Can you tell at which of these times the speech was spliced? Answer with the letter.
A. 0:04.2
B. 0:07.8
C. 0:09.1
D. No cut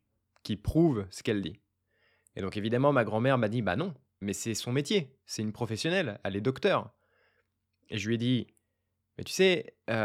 A